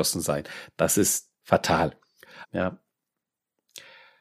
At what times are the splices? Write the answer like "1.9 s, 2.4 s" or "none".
2.4 s

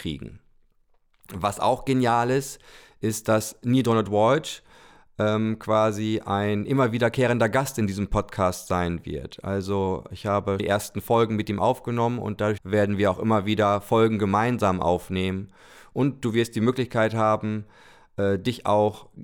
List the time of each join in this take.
10.6 s, 12.6 s

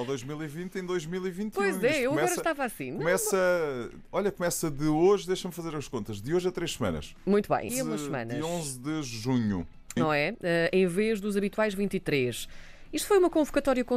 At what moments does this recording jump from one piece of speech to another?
7.7 s, 10.0 s

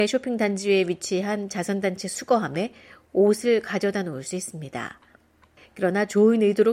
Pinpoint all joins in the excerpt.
5.6 s

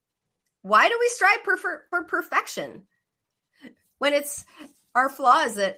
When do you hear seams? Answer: none

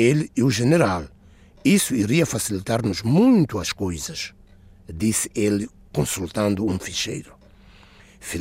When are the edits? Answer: none

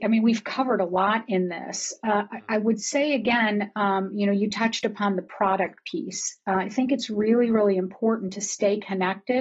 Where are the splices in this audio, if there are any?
none

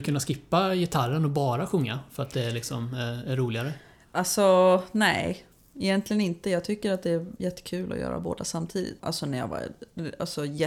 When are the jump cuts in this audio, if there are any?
7.4 s, 9.0 s

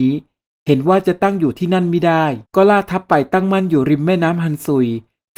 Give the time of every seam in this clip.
2.5 s

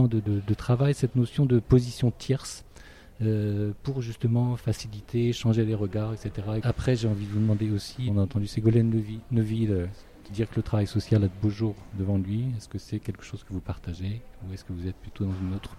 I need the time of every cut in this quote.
6.6 s, 8.1 s, 10.3 s

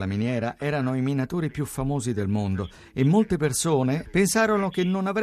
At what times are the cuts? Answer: 4.0 s

